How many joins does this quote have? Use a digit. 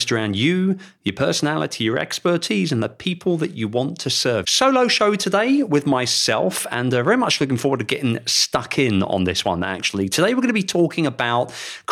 1